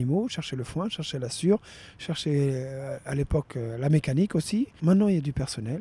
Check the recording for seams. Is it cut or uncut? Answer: cut